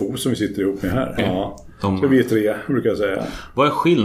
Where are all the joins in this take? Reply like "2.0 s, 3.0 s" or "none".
1.2 s